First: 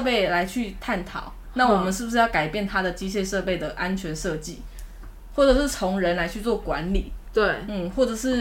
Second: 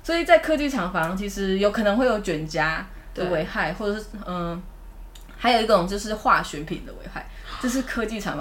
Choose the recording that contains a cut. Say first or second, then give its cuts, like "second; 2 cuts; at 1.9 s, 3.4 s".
first; 1 cut; at 7.2 s